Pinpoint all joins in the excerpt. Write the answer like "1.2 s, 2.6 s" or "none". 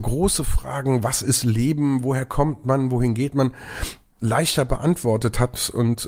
none

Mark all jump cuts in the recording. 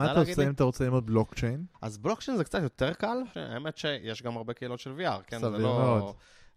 1.7 s, 3.3 s

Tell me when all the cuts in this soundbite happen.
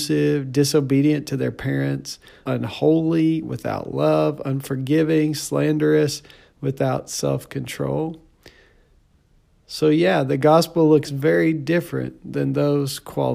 2.5 s

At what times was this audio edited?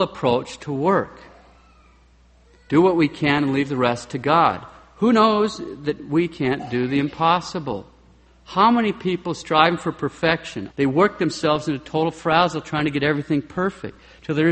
10.7 s

